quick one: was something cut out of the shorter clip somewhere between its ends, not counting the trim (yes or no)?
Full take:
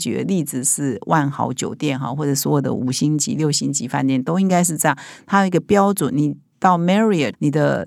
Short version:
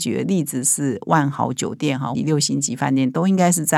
yes